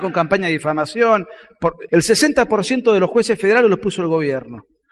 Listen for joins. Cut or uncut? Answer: cut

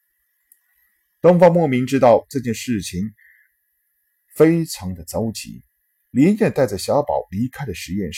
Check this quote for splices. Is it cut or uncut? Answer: uncut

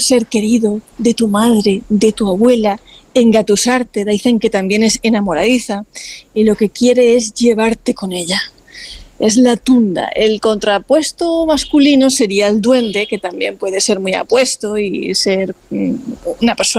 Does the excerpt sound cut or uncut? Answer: uncut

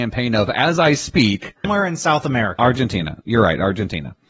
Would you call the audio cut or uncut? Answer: cut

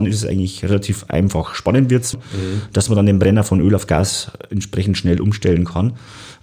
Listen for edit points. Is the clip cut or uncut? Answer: cut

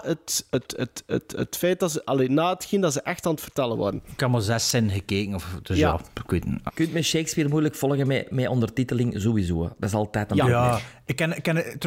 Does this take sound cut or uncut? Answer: cut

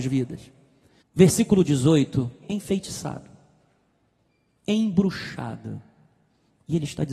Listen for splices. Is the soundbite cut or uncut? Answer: cut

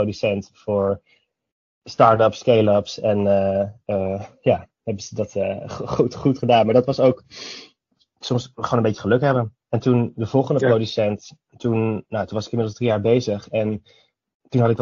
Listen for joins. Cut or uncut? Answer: uncut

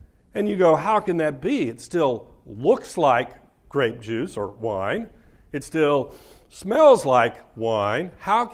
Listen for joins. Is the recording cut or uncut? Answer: uncut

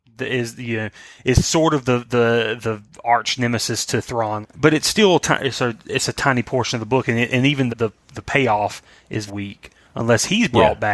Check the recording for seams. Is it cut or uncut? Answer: cut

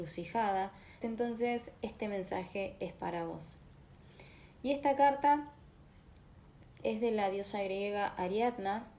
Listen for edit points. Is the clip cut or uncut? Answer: cut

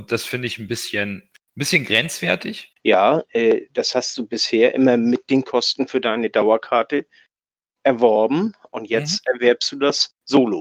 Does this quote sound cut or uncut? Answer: cut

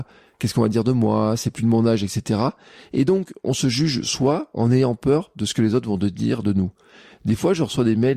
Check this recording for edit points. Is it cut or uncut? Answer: uncut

